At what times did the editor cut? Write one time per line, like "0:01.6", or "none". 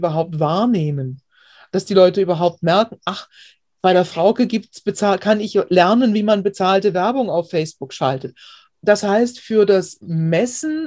0:08.7